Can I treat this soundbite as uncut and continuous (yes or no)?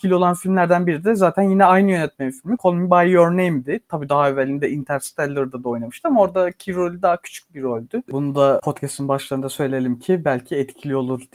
no